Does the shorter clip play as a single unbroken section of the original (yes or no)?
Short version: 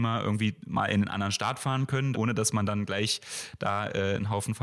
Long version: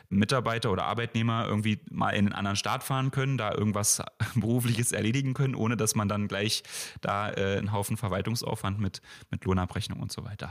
no